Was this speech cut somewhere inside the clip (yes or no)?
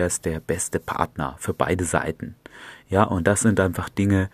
no